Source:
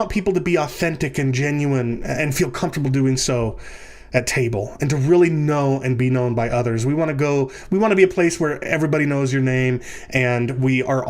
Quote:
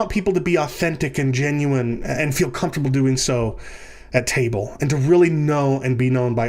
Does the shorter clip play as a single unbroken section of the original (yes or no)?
yes